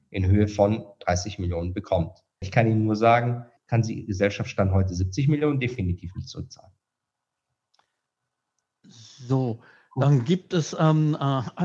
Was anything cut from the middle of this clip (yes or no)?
yes